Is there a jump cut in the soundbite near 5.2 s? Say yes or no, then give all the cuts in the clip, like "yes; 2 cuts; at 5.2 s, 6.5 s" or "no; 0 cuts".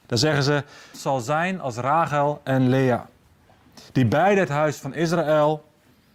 no; 2 cuts; at 0.9 s, 3.9 s